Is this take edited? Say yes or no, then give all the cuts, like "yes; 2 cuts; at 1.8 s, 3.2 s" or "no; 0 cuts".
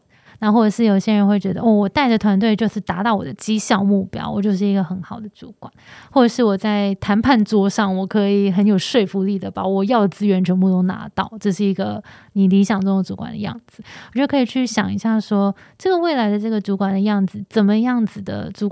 no; 0 cuts